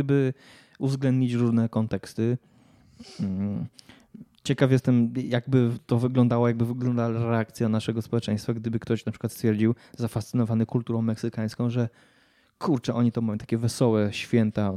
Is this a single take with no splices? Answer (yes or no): yes